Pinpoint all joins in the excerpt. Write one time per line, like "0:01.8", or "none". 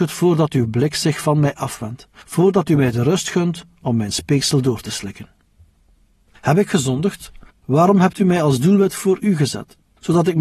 0:06.3
0:07.5